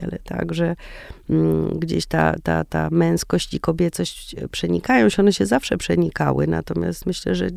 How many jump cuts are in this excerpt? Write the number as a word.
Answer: zero